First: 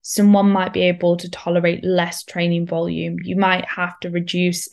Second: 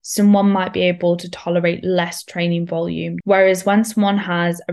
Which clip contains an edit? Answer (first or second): second